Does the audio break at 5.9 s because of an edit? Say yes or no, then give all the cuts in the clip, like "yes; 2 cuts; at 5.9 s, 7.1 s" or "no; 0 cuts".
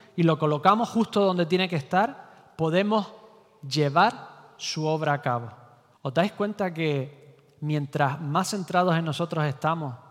yes; 1 cut; at 5.9 s